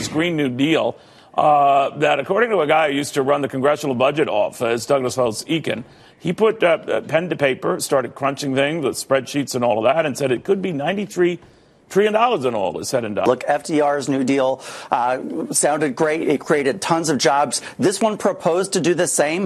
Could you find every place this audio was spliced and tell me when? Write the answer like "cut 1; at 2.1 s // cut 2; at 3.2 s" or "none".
none